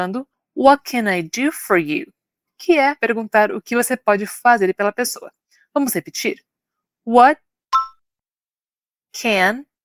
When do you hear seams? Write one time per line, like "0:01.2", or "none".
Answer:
0:03.0